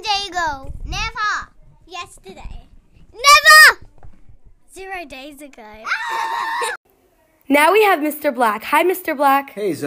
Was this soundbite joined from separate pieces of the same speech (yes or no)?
no